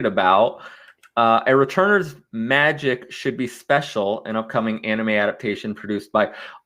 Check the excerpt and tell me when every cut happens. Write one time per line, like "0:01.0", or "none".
none